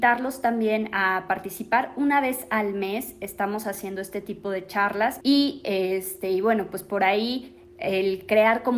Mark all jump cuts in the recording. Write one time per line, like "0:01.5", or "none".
0:05.2